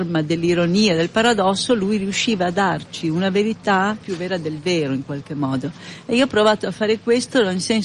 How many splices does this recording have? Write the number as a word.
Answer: one